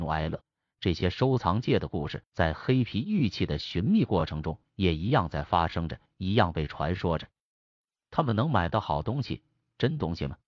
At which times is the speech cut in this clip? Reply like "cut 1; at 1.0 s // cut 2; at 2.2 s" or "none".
none